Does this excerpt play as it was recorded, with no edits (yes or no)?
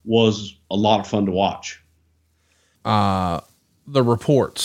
no